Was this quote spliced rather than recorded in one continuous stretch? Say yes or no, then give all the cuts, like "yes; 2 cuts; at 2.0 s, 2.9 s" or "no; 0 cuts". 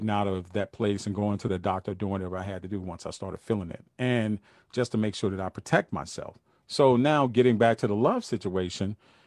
no; 0 cuts